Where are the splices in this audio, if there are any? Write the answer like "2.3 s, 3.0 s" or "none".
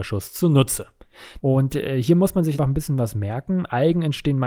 1.4 s, 2.6 s